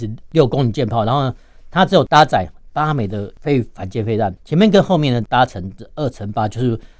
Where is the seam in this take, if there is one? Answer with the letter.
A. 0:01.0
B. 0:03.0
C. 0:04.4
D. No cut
C